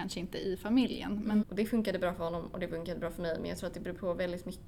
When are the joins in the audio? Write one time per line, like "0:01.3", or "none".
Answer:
0:01.4